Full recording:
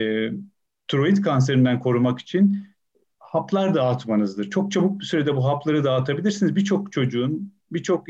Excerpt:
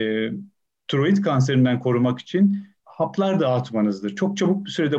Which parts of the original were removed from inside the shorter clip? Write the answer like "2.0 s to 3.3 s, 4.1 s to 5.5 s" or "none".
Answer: 2.8 s to 3.1 s